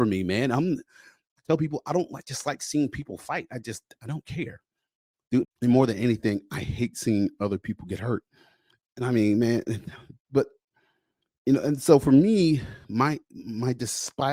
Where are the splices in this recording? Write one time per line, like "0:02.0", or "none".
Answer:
0:05.4